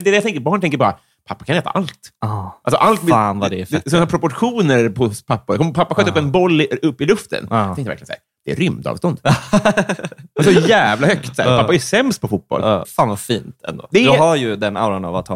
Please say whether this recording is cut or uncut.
cut